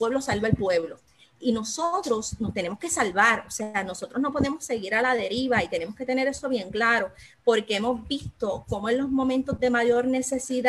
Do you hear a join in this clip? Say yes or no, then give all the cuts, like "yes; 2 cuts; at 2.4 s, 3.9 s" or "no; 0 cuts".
no; 0 cuts